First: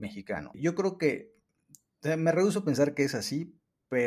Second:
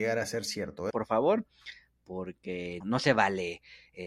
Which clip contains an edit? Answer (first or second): second